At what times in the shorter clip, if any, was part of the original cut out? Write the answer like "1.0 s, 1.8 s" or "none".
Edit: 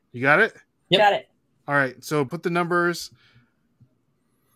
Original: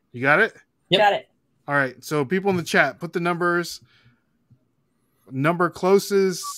2.3 s